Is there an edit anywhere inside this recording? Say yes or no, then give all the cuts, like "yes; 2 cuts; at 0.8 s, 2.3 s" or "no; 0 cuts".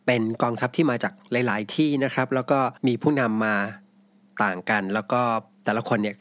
yes; 1 cut; at 2.8 s